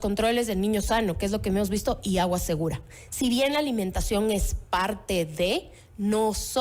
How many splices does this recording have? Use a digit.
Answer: 0